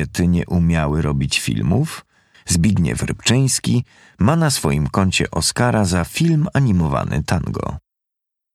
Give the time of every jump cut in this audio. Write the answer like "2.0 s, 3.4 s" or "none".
2.3 s